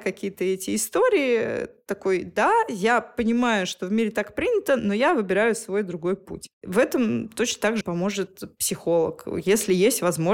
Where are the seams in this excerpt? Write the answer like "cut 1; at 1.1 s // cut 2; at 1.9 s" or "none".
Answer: cut 1; at 7.8 s